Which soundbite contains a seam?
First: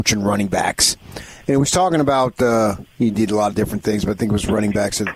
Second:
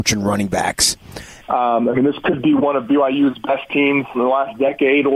second; 2 cuts; at 1.4 s, 4.1 s

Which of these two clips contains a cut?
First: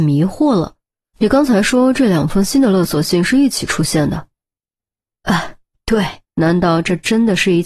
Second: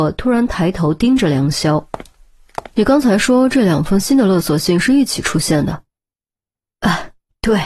first; 2 cuts; at 1.2 s, 6.2 s

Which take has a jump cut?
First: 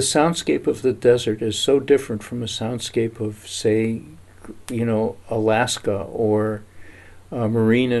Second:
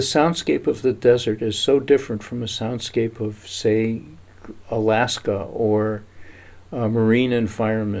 second; 1 cut; at 4.6 s

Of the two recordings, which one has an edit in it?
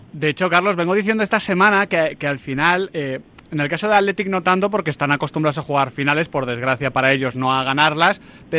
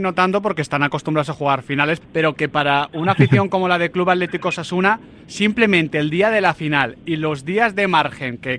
second; 1 cut; at 2.0 s

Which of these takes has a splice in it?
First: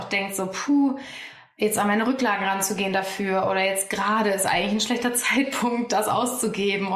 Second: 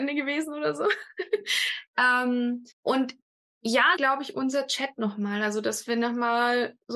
second; 2 cuts; at 2.7 s, 4.0 s

